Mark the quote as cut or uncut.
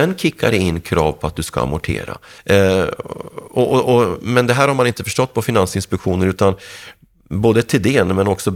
cut